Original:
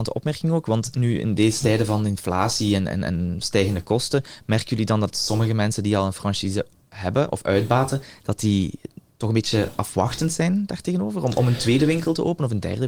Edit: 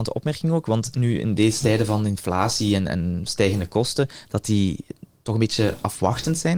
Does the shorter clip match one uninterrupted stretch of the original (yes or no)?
no